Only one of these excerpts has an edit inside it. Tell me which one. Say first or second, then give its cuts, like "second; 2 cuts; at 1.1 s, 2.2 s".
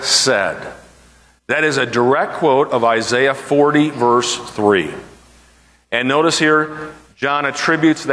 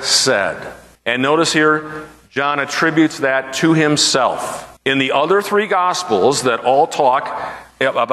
second; 2 cuts; at 1.0 s, 4.8 s